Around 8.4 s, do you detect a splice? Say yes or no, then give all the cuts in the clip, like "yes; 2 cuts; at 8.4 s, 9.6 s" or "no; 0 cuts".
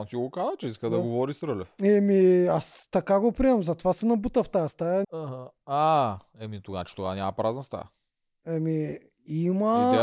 no; 1 cut; at 5.0 s